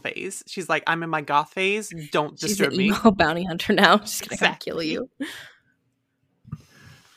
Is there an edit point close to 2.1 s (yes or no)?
no